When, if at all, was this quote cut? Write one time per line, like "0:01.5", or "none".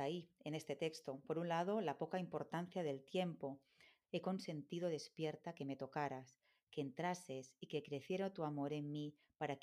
0:04.0